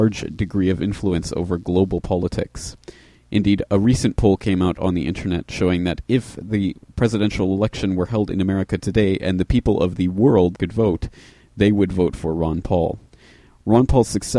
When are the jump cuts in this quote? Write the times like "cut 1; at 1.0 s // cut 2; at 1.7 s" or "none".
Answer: cut 1; at 10.6 s